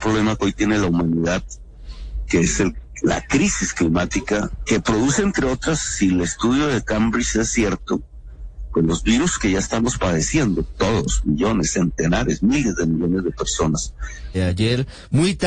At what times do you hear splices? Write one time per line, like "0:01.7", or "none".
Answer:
0:14.3